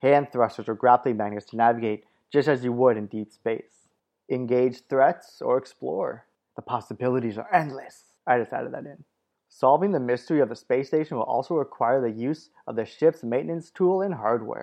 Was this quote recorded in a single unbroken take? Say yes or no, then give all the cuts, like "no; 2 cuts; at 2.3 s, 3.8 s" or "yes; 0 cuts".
yes; 0 cuts